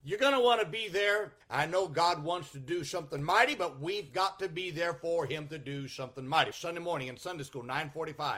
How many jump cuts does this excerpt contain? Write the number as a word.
two